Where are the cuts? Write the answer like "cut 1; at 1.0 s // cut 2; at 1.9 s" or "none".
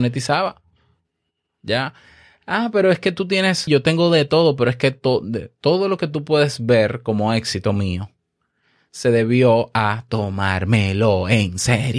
cut 1; at 3.7 s